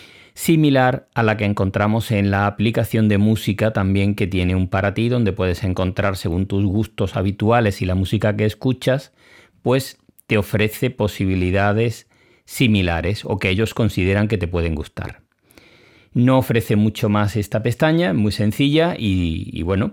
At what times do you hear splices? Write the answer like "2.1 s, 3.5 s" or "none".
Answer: none